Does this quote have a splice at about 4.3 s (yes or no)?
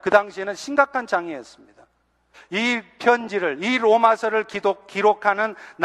no